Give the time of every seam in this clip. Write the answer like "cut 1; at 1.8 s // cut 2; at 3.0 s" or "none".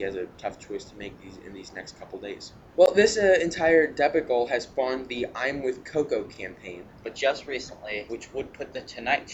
cut 1; at 2.7 s // cut 2; at 7.0 s // cut 3; at 8.1 s